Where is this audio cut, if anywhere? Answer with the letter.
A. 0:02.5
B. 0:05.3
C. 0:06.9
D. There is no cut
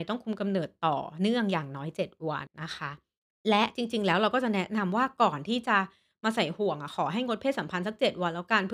A